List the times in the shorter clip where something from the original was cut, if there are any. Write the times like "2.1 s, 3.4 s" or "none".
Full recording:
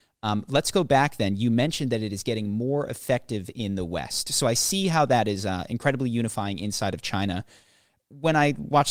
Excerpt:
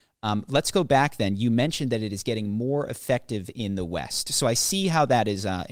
none